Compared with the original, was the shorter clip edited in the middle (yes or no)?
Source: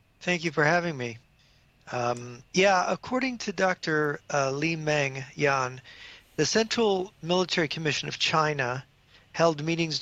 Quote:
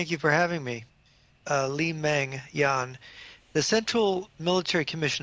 yes